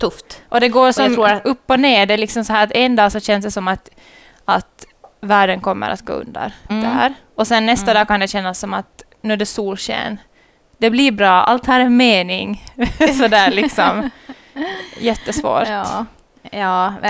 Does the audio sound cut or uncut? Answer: cut